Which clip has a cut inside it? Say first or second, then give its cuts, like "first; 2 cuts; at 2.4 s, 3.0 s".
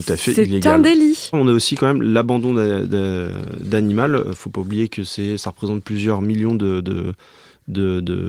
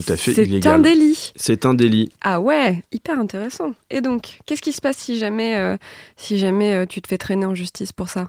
first; 1 cut; at 1.3 s